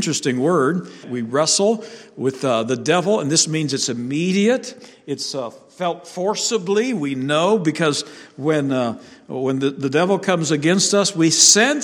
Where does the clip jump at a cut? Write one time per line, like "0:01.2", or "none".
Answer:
0:01.0